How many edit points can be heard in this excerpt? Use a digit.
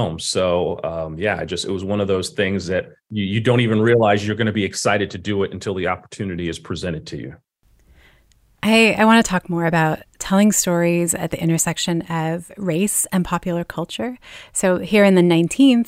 1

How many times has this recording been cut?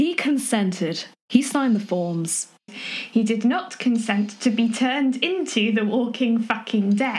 1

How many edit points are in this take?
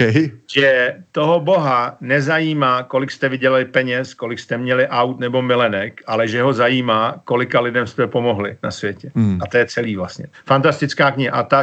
1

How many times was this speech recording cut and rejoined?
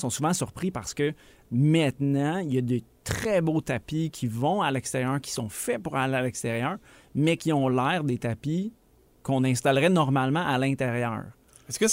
0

